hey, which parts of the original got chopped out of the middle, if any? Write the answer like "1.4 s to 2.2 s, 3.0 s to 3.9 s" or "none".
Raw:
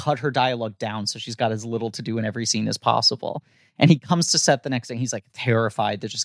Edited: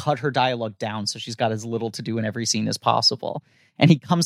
none

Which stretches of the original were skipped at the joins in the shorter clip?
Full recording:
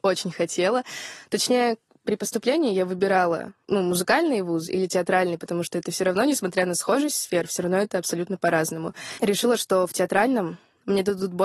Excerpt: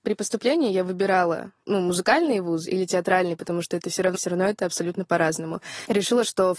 6.2 s to 7.5 s

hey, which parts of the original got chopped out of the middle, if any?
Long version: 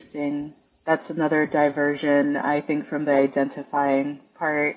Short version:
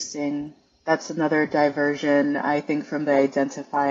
none

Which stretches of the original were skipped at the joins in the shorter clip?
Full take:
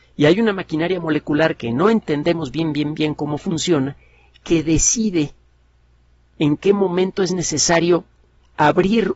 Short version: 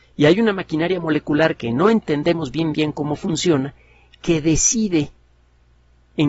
2.7 s to 3.0 s

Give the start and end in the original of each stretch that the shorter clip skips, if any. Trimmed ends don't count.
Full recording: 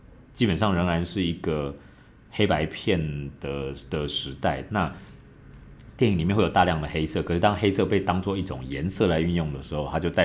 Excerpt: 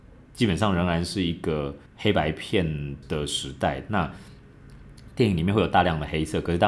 1.9 s to 2.2 s, 3.4 s to 3.8 s

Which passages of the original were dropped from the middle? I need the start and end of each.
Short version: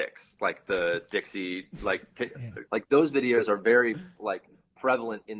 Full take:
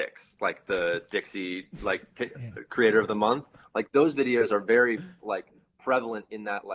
2.7 s to 3.7 s

